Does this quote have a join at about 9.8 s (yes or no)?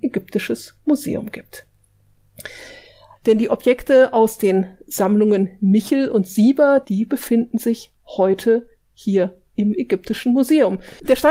no